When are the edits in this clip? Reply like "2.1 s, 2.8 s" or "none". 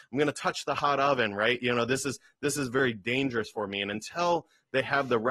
none